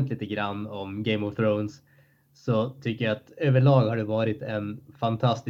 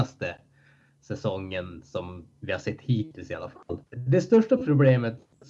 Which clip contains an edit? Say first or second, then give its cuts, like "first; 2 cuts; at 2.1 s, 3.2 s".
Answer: second; 1 cut; at 3.8 s